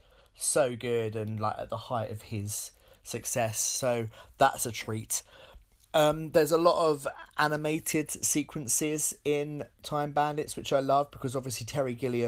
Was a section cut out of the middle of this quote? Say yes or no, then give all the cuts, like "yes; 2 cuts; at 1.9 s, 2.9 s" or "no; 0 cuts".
no; 0 cuts